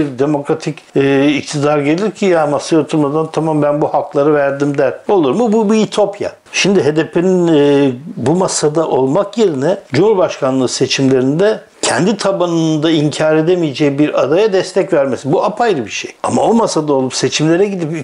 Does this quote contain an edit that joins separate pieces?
no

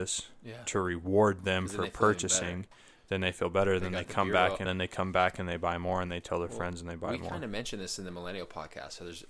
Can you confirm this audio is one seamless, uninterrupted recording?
no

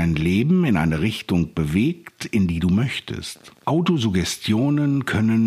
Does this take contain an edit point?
yes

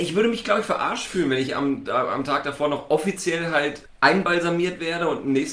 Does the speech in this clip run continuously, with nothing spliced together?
no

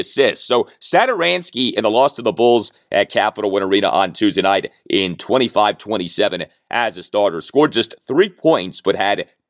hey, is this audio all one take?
yes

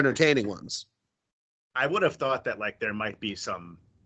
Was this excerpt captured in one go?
yes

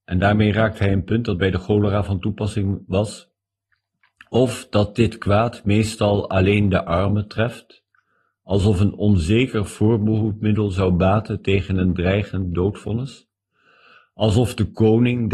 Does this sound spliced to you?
no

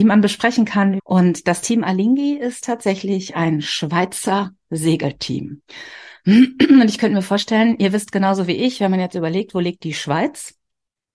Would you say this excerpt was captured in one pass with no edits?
no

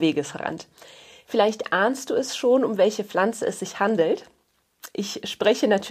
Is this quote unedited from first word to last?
yes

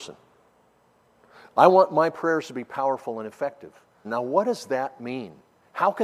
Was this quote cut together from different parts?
yes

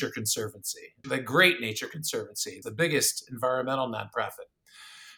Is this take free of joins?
no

